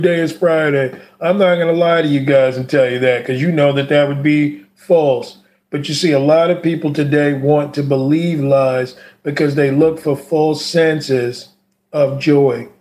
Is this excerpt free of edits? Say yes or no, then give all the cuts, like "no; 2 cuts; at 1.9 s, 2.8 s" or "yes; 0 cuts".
yes; 0 cuts